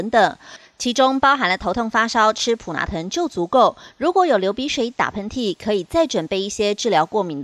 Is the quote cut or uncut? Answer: uncut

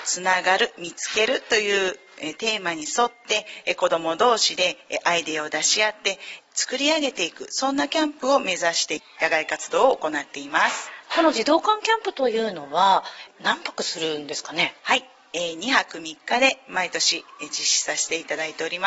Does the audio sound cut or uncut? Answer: cut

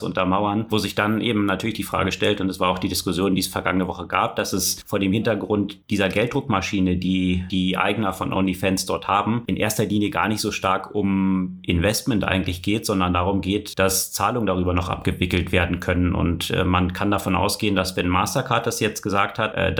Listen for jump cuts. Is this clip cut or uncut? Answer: uncut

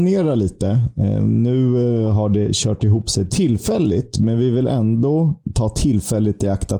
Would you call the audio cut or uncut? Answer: uncut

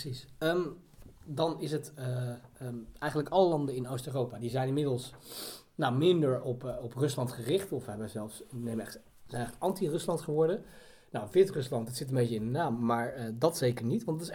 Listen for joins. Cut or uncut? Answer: uncut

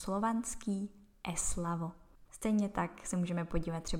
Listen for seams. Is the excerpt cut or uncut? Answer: cut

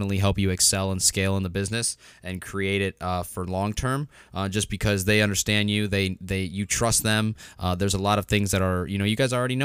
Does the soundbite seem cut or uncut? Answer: uncut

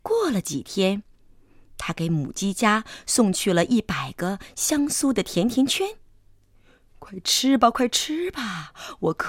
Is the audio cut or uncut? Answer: uncut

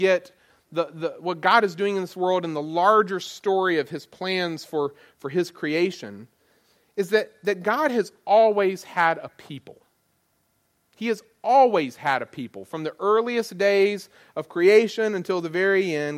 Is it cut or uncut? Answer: uncut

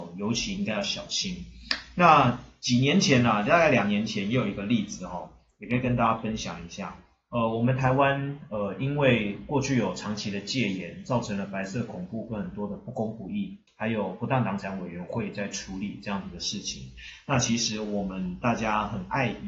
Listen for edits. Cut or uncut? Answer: cut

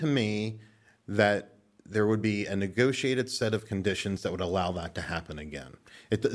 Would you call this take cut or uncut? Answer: uncut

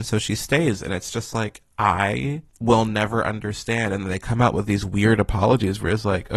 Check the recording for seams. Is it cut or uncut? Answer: cut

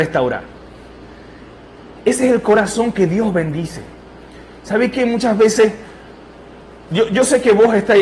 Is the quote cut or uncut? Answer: uncut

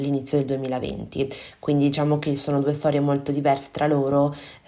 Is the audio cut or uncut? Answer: uncut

